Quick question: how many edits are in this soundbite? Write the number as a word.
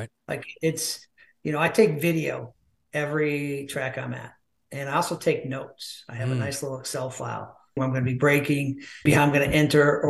two